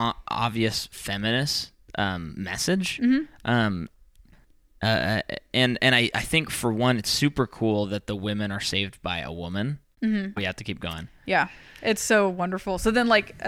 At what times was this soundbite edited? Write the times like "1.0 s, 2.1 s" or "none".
10.4 s

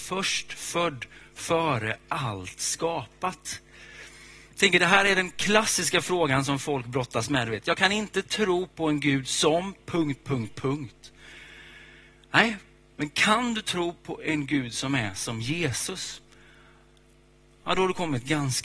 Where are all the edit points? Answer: none

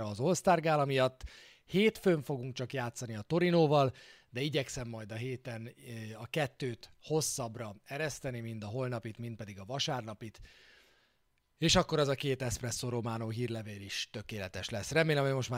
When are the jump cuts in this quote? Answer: none

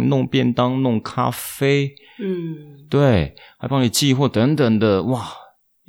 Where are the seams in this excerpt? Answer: none

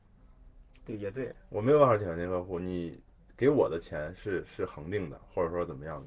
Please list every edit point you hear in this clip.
none

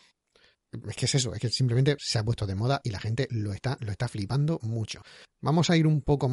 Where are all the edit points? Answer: none

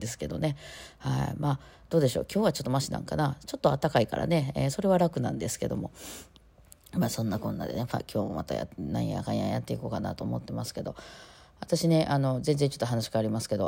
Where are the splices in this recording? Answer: none

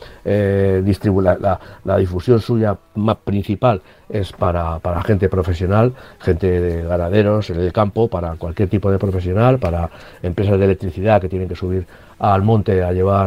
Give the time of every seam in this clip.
none

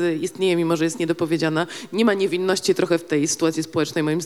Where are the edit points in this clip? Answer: none

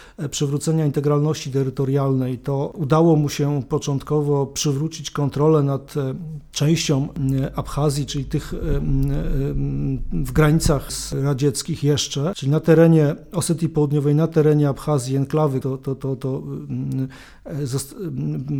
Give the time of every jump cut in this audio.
8.1 s, 15.6 s

